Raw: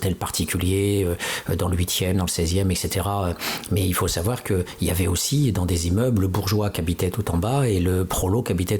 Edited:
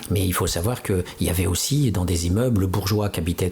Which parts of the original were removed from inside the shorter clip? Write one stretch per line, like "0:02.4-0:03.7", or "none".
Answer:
none